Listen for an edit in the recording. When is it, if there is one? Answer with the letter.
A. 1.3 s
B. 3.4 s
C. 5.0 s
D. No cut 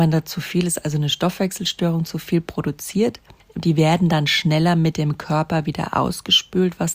B